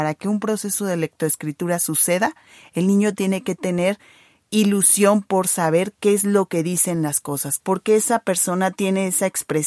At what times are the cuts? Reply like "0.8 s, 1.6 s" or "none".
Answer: 7.6 s